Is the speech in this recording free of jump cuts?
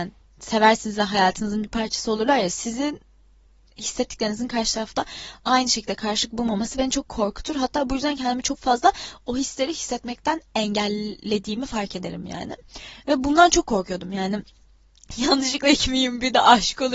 yes; 0 cuts

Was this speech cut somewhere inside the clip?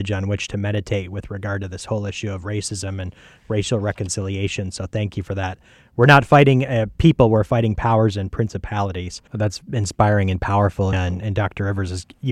yes; 2 cuts; at 9.3 s, 10.9 s

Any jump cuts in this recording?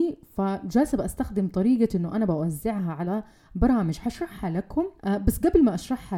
yes; 1 cut; at 5.0 s

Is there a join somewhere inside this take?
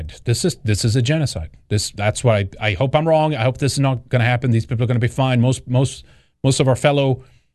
no; 0 cuts

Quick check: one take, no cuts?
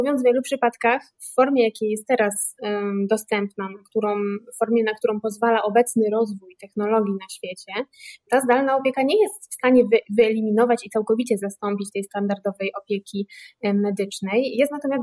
yes; 0 cuts

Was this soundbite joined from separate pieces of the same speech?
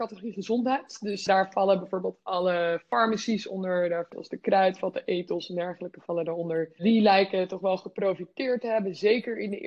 yes; 1 cut; at 1.3 s

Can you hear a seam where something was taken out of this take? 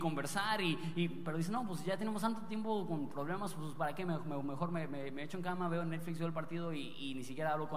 no; 0 cuts

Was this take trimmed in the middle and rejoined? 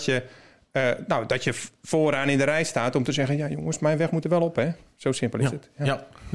no; 0 cuts

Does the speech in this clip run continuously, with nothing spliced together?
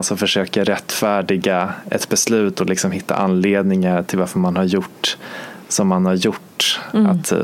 yes; 0 cuts

